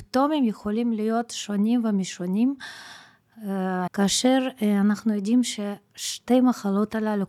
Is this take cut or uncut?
cut